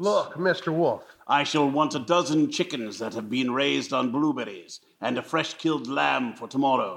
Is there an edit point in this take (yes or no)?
no